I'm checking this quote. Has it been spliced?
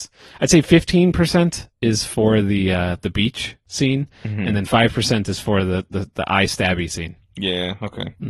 no; 0 cuts

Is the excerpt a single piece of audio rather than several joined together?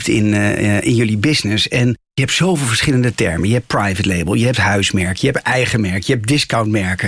yes; 0 cuts

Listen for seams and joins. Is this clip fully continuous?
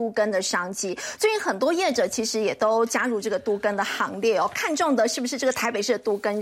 yes; 0 cuts

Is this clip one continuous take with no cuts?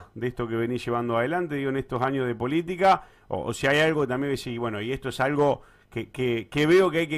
yes; 0 cuts

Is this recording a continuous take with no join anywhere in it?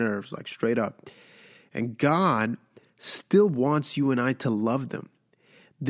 yes; 0 cuts

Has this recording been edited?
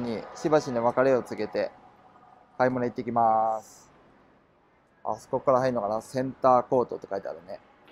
no; 0 cuts

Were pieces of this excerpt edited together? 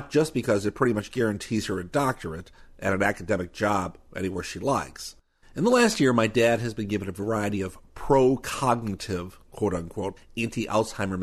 yes; 1 cut; at 5.4 s

